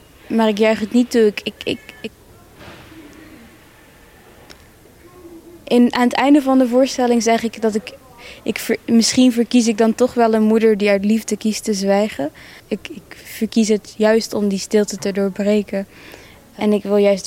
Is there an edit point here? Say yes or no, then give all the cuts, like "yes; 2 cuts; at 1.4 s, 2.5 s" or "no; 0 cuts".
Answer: yes; 1 cut; at 12.6 s